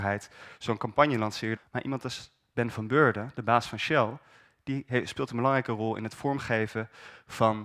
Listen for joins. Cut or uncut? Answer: cut